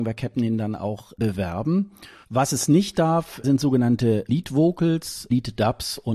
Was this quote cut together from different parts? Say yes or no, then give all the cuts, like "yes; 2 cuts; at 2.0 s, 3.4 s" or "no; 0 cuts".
yes; 1 cut; at 2.2 s